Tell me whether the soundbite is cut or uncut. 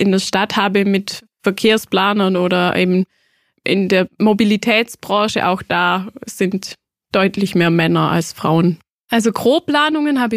cut